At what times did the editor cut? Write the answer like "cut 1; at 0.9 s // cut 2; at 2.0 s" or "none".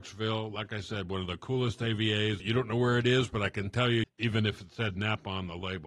cut 1; at 2.4 s // cut 2; at 4.0 s